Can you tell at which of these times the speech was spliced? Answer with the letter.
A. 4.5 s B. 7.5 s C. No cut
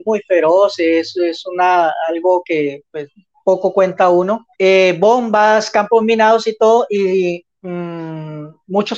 A